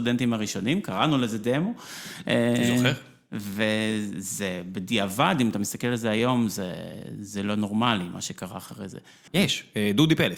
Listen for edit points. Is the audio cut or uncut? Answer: cut